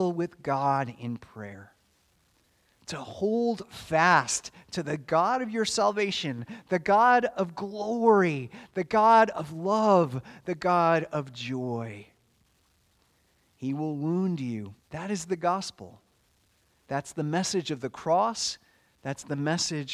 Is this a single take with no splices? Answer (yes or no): no